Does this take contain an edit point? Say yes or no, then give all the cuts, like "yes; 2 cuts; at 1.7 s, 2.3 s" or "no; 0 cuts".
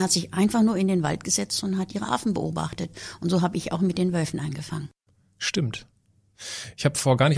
no; 0 cuts